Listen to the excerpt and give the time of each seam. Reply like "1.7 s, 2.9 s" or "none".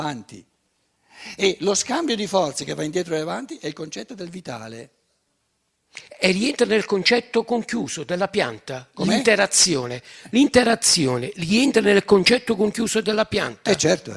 none